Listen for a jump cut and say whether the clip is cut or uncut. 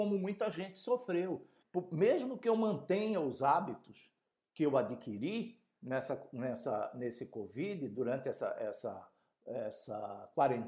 cut